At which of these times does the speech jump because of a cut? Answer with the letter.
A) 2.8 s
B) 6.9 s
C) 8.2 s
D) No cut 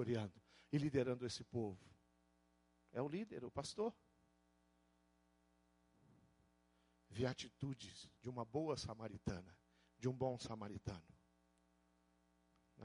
C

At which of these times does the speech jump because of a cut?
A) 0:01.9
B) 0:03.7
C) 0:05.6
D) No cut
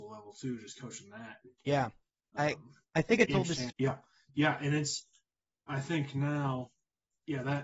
B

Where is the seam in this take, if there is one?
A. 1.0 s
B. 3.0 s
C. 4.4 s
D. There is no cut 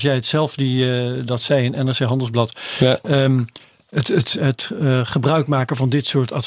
C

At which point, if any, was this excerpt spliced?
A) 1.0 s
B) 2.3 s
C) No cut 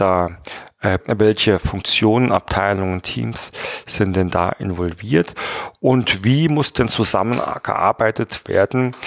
A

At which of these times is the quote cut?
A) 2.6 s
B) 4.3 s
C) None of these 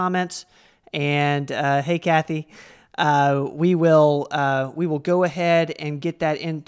C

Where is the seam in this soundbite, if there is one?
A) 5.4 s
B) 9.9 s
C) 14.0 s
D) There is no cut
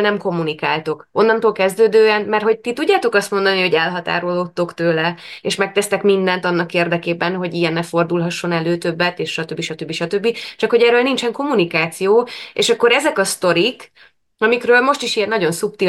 D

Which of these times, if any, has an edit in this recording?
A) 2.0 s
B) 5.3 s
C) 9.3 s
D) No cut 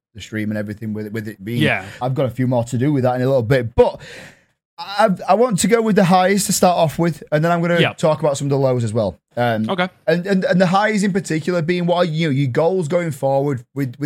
A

